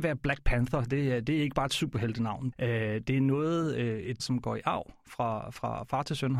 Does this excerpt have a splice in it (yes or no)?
yes